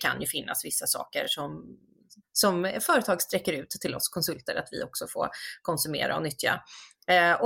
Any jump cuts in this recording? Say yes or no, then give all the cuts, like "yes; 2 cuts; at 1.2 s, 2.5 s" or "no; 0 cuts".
no; 0 cuts